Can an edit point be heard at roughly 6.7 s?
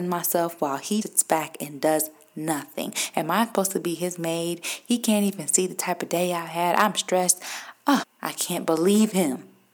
no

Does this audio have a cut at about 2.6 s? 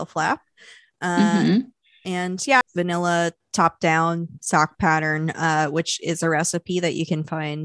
yes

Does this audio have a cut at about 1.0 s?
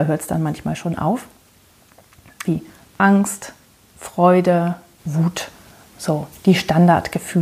no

